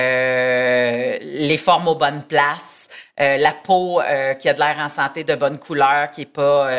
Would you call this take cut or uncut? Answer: uncut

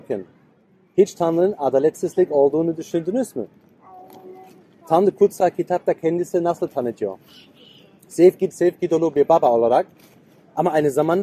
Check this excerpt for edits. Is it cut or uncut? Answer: cut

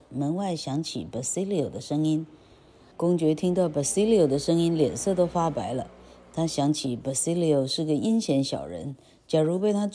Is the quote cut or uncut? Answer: cut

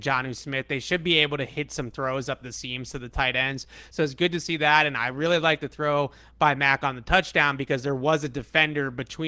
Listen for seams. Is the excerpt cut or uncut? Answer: uncut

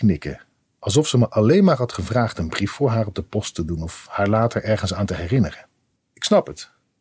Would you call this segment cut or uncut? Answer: cut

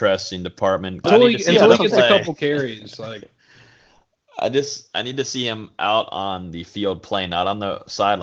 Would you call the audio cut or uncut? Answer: cut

